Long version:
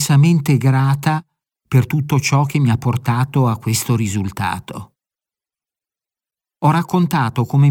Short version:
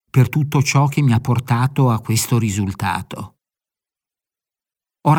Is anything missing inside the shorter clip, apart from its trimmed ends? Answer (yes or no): no